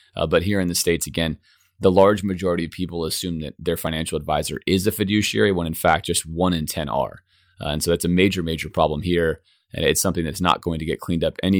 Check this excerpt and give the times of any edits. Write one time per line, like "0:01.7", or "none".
none